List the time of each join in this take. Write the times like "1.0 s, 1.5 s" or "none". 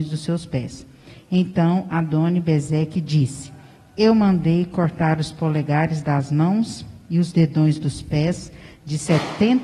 none